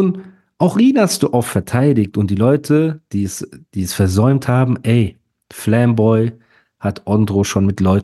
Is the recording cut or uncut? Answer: uncut